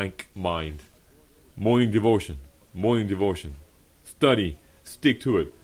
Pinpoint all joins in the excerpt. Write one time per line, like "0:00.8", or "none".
0:01.5